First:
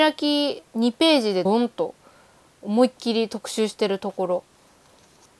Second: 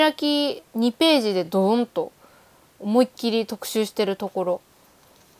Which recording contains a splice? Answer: first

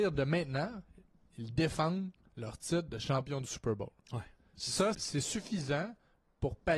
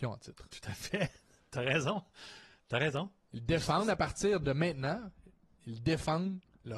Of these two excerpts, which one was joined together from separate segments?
first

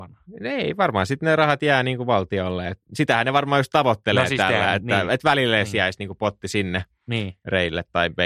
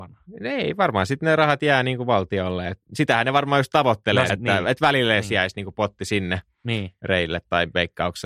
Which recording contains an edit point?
second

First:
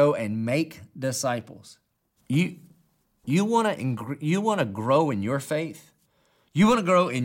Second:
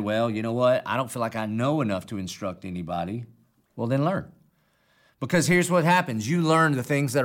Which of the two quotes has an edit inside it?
first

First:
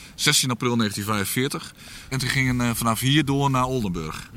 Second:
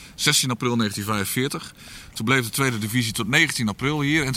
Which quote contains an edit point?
first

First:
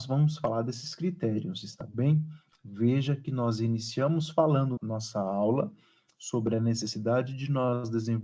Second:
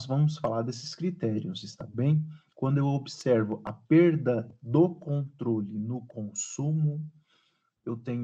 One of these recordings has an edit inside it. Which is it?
first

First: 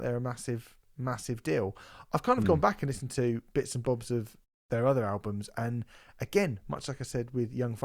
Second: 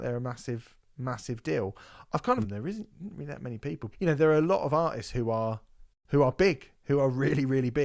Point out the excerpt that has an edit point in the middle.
second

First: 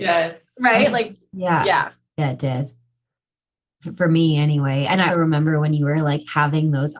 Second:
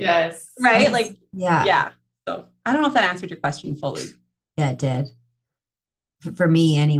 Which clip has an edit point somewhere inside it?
first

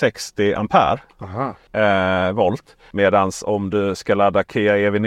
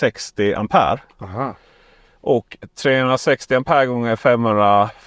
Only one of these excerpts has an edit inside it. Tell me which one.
first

